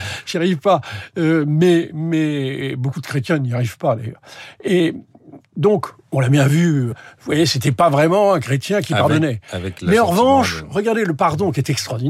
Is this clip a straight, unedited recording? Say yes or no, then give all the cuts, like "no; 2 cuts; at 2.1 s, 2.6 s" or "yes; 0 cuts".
no; 1 cut; at 6.9 s